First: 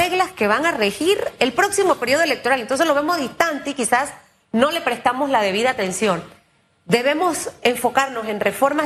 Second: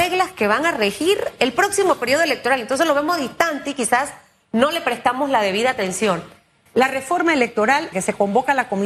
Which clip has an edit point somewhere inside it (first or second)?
second